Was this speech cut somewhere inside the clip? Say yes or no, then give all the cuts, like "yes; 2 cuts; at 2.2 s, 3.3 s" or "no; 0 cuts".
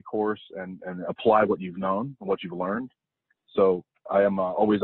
yes; 1 cut; at 3.4 s